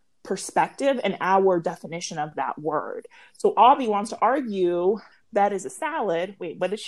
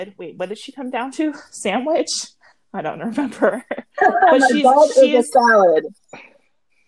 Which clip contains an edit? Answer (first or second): first